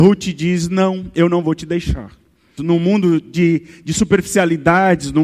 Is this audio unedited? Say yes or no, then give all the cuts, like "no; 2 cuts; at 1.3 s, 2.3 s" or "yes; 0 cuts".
no; 1 cut; at 2.6 s